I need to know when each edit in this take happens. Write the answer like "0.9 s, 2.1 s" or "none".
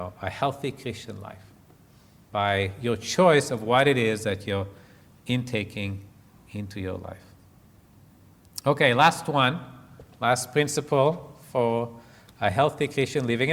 none